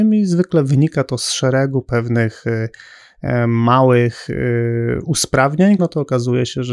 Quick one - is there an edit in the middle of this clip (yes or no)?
yes